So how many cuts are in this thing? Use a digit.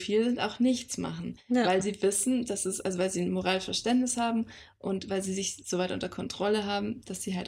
0